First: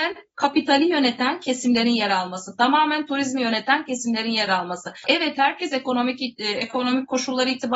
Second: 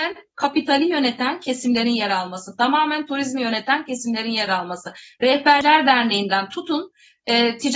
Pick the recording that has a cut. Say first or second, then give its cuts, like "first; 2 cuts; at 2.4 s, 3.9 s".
first; 1 cut; at 5.0 s